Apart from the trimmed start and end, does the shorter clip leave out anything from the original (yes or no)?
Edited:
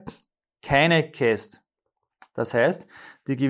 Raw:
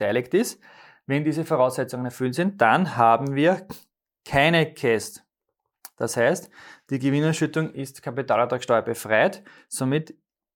no